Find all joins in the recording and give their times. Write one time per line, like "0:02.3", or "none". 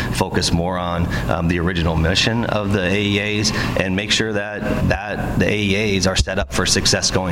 0:04.8